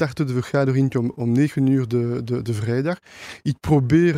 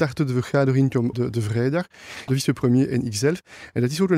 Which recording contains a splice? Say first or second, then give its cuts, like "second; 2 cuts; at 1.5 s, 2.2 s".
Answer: second; 2 cuts; at 1.1 s, 2.3 s